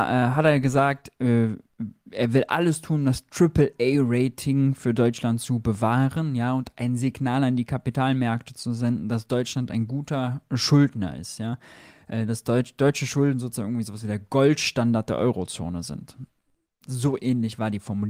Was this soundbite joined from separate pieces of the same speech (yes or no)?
no